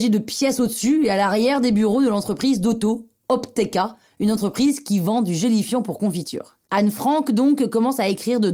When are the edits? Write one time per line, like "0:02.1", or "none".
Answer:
0:06.7

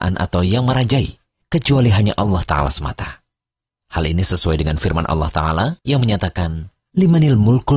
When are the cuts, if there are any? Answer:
none

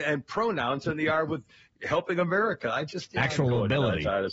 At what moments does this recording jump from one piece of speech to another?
none

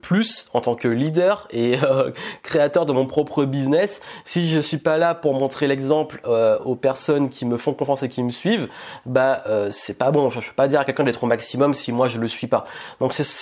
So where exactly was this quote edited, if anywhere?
none

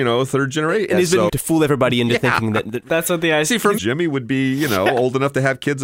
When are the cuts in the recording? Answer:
0:01.3
0:03.8

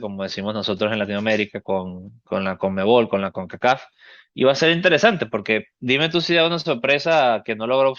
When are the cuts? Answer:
none

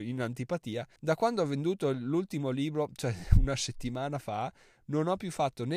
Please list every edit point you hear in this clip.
0:01.0

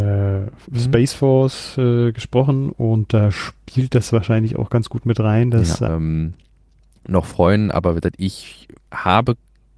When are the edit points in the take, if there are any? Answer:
0:05.9

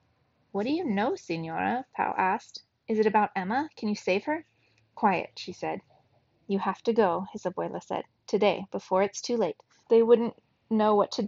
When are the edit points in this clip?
0:06.3
0:08.2
0:09.8

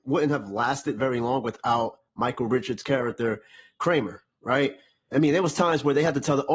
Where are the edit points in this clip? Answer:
0:05.1

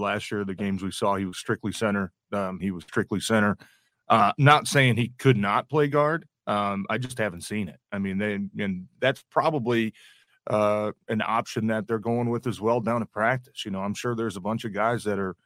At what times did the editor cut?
0:02.6

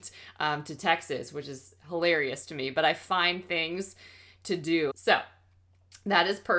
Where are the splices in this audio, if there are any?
0:04.9

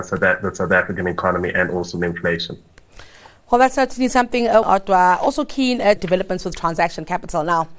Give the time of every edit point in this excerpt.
0:04.6
0:06.0

